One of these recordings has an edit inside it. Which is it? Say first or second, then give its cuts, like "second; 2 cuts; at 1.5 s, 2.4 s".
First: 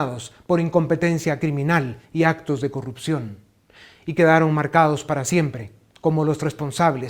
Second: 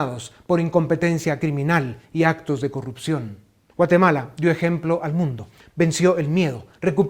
second; 2 cuts; at 3.7 s, 5.6 s